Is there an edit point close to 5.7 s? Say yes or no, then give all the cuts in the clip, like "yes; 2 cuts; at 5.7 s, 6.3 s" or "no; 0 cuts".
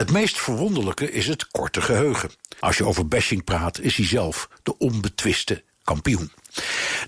no; 1 cut; at 2.6 s